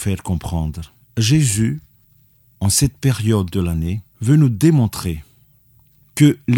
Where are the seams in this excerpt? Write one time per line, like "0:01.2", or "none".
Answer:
0:01.0
0:04.1